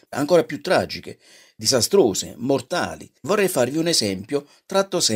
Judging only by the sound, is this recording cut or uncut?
cut